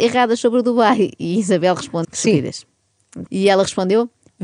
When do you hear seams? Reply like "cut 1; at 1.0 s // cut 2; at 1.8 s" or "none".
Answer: cut 1; at 2.0 s // cut 2; at 3.3 s